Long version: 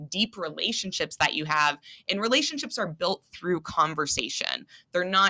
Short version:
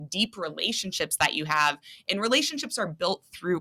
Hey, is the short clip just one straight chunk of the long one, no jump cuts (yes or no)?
yes